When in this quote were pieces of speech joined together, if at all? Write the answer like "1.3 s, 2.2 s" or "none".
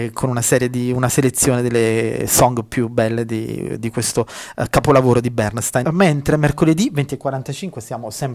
5.8 s